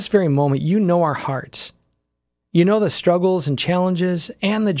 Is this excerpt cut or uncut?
uncut